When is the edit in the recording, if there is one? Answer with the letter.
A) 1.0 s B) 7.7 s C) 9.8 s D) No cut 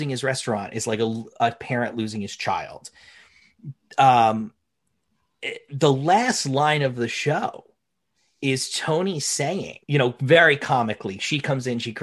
C